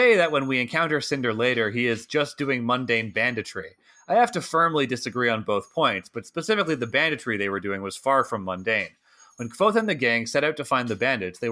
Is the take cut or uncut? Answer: uncut